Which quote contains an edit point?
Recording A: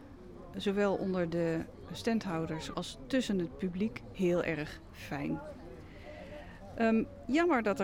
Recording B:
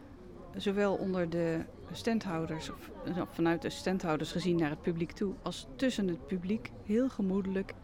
A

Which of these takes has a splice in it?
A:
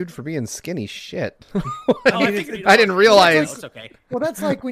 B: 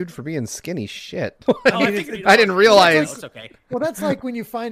B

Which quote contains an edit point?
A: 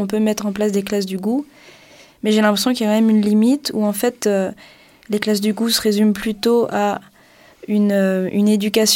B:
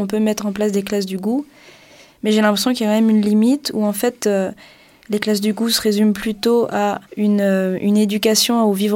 B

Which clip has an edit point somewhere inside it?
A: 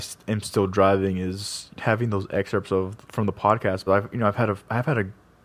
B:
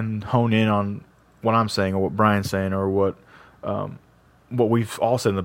A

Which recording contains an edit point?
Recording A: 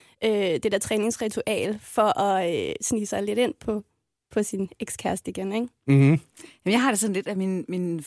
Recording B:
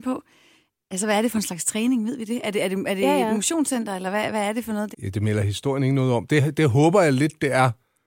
B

